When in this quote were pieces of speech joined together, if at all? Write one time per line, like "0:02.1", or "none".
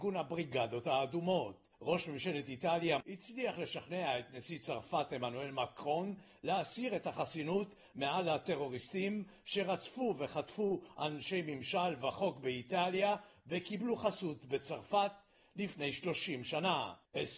0:03.0